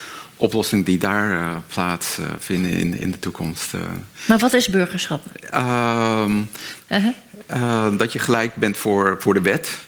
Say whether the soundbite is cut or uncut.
cut